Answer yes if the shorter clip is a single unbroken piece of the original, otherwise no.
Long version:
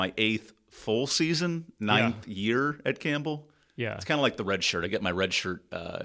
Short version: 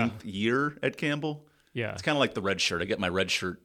yes